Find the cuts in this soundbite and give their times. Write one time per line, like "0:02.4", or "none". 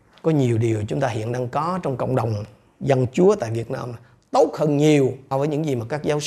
0:05.3